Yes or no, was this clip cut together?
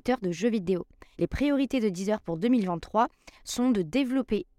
yes